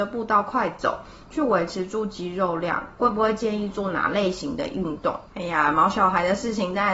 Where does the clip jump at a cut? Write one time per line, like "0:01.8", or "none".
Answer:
0:03.0
0:05.3